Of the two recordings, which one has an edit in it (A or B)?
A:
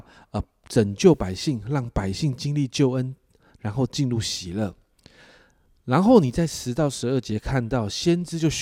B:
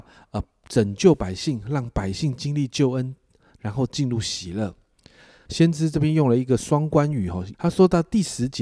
B